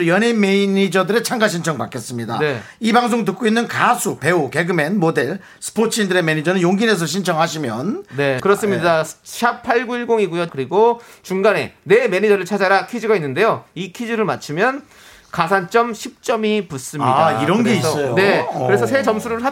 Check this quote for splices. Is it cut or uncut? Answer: cut